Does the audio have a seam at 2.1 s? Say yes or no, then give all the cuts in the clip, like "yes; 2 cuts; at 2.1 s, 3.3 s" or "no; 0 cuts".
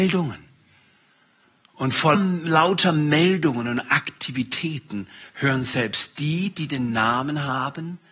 yes; 1 cut; at 2.1 s